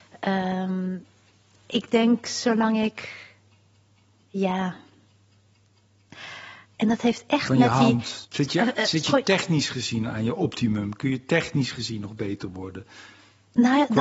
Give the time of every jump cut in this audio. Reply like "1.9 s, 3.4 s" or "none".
6.6 s, 8.2 s